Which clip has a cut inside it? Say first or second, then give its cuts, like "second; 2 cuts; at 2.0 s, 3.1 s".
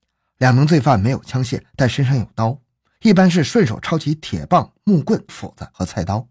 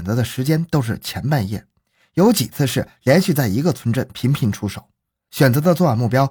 first; 1 cut; at 5.3 s